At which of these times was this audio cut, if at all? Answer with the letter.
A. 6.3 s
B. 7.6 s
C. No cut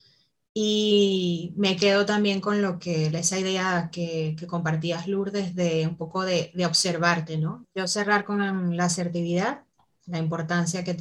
B